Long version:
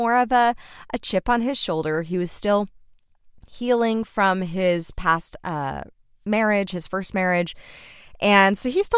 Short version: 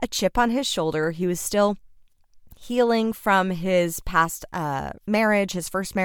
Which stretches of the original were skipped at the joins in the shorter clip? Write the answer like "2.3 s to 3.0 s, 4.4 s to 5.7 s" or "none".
5.9 s to 6.2 s